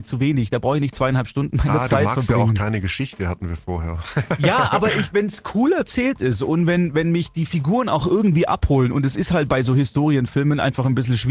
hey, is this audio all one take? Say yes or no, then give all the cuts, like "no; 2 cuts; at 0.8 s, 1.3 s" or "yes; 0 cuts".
yes; 0 cuts